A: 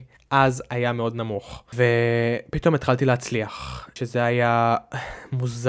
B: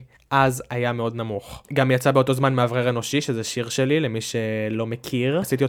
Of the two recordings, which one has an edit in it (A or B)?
B